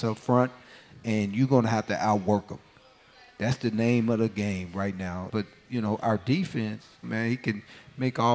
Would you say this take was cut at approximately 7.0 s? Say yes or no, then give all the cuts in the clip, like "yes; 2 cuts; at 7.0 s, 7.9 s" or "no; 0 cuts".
yes; 2 cuts; at 5.3 s, 7.0 s